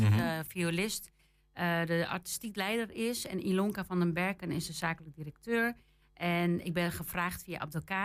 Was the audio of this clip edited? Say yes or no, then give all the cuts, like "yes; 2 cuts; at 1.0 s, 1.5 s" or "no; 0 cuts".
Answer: no; 0 cuts